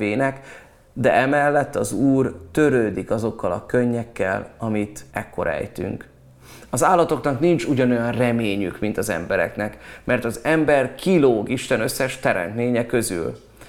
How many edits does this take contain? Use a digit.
1